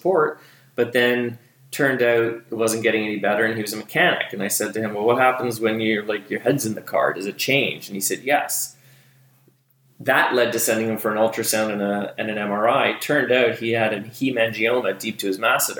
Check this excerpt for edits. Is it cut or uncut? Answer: uncut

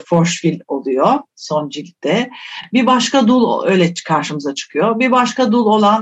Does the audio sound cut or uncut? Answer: uncut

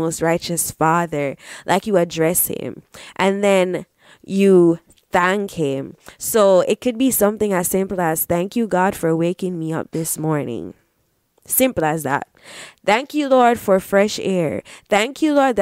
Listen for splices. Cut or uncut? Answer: uncut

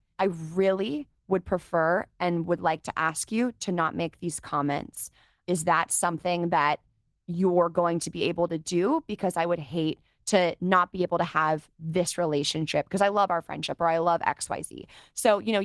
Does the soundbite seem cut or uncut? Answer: uncut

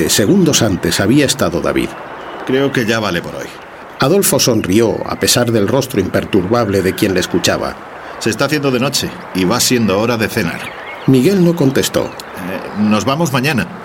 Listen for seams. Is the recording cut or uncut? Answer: uncut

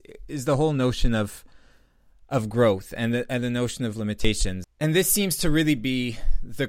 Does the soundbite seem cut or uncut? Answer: uncut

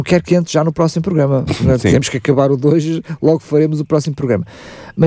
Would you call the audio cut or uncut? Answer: uncut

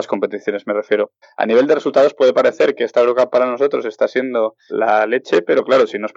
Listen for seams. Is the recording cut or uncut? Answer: cut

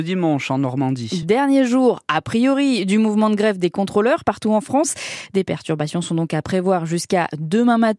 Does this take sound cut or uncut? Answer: uncut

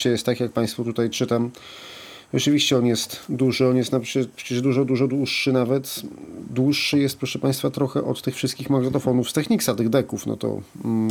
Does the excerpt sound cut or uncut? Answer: uncut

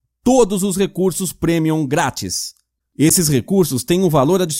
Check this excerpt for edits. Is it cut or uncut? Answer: uncut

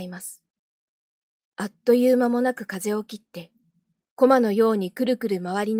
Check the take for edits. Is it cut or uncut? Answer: cut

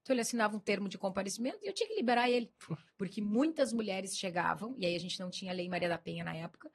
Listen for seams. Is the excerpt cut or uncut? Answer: cut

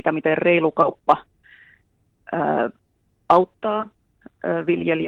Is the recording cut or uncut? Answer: uncut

